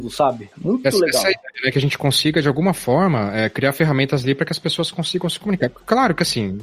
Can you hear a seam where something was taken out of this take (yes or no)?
no